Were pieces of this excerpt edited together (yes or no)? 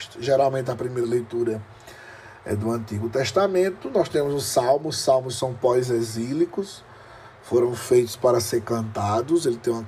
no